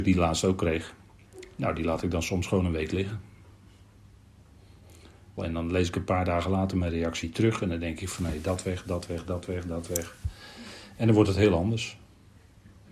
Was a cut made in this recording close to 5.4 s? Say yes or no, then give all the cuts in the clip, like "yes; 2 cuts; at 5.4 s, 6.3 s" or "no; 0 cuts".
yes; 1 cut; at 5.4 s